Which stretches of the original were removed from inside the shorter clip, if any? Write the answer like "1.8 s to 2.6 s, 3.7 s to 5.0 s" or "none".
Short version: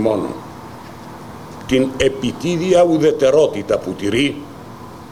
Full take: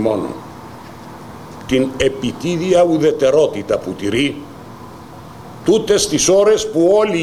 none

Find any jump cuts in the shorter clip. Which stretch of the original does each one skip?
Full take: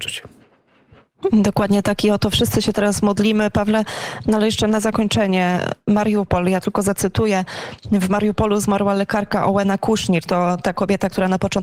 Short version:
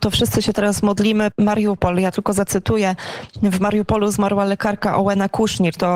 3.5 s to 5.8 s

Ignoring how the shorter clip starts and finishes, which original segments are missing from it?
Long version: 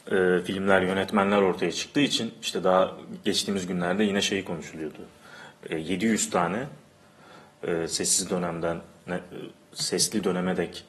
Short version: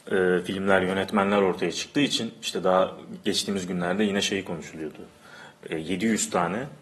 none

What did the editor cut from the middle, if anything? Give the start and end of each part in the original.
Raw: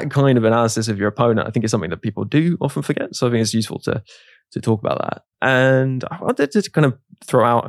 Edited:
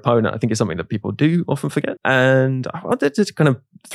3.1 s to 5.3 s

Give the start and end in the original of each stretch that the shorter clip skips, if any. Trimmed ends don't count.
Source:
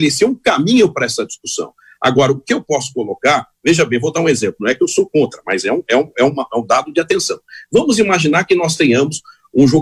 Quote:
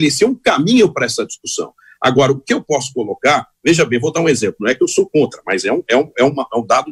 none

